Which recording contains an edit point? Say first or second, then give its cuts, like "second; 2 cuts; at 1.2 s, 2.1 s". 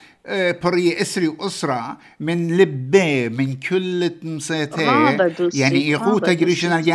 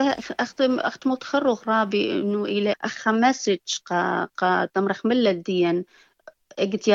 second; 1 cut; at 2.7 s